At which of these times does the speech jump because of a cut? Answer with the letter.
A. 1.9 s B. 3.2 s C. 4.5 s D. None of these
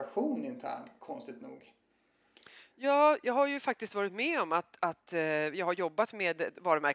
D